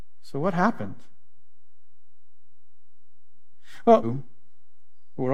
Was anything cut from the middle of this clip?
yes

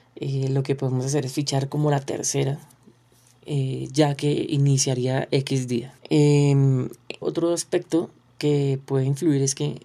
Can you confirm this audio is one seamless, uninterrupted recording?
no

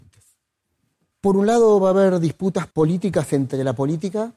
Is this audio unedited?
no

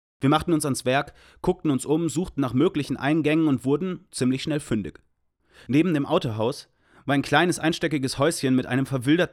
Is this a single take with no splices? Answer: yes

